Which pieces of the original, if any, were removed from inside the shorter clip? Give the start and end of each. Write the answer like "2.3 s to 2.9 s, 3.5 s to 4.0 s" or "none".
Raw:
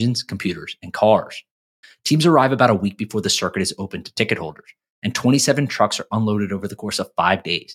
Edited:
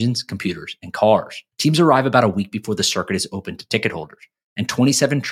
1.5 s to 2.0 s

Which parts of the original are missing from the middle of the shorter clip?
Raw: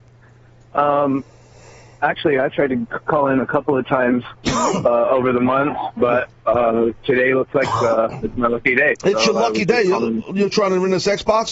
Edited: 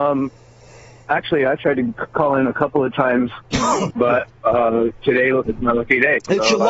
4.8 s to 5.9 s, 7.5 s to 8.2 s

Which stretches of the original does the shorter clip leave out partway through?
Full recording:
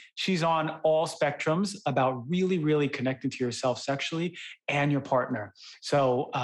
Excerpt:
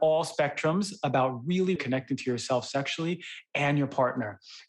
2.6 s to 2.9 s

